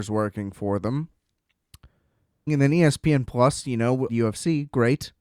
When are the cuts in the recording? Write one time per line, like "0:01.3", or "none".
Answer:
0:02.5
0:04.1

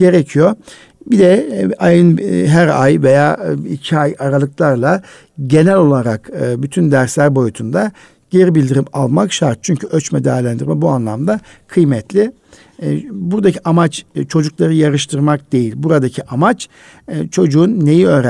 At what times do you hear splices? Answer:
none

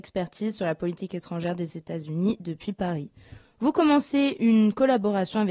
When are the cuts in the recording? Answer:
0:03.4

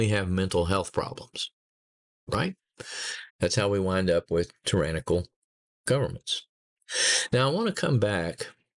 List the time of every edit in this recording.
0:03.3

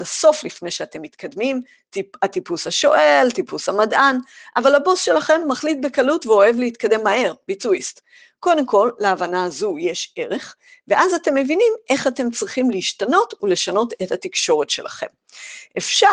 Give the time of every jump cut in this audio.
none

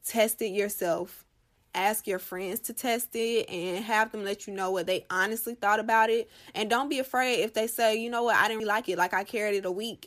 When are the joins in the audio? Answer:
0:08.6

